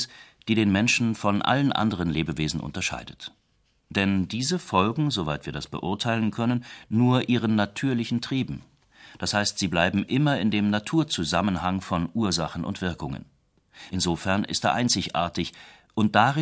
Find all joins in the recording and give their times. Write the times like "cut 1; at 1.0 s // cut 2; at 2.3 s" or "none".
cut 1; at 13.9 s